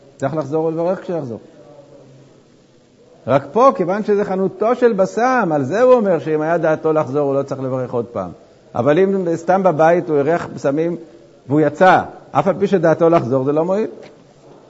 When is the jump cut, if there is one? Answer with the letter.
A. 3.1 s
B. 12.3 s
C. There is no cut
A